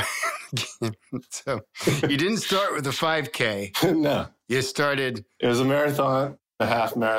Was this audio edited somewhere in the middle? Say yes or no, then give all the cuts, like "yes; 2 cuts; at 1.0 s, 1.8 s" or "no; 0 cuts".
no; 0 cuts